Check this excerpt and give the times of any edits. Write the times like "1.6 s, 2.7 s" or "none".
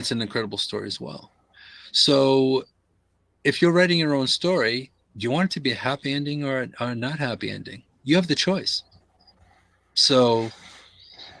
none